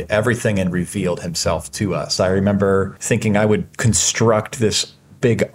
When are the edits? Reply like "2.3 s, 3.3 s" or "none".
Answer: 2.2 s

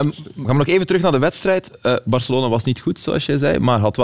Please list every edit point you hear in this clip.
none

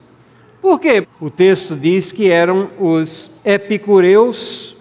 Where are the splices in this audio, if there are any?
1.0 s, 3.4 s

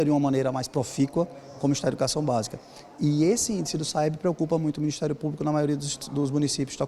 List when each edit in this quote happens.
none

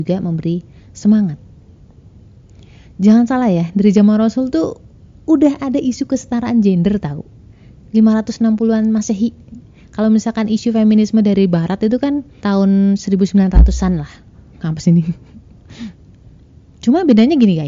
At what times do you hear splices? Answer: 12.4 s

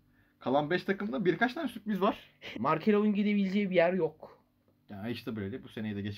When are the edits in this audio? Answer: 2.5 s

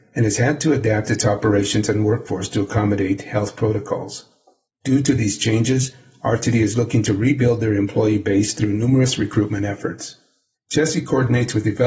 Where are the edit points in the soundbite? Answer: 10.5 s

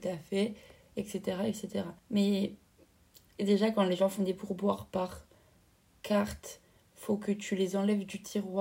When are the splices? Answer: 2.0 s

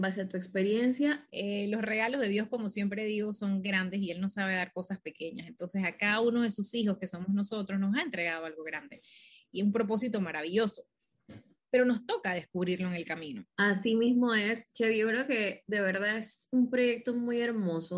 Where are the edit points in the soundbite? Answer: 1.3 s, 13.5 s

